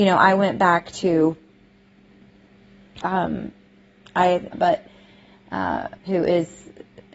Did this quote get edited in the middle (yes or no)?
yes